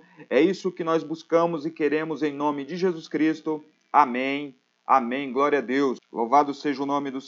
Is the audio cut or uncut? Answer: cut